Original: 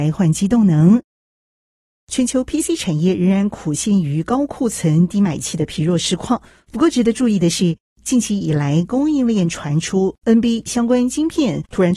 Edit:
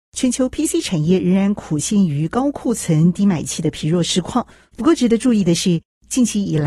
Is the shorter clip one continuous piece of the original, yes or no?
yes